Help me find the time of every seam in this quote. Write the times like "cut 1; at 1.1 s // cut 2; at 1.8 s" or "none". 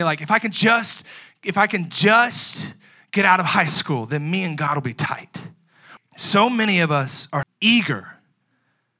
cut 1; at 6.0 s // cut 2; at 7.4 s